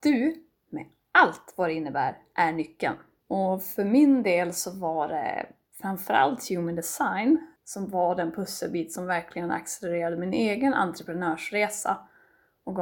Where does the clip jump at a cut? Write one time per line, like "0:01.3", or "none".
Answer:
0:03.2
0:07.6